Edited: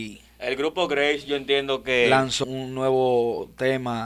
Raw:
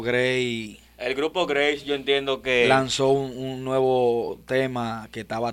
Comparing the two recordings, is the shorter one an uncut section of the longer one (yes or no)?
no